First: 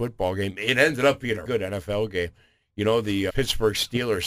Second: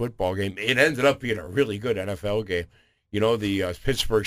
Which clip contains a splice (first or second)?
first